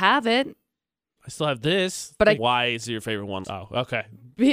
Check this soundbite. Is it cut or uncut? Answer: cut